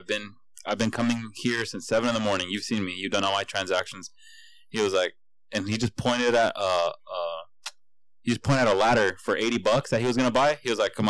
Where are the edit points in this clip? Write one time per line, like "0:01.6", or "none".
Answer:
none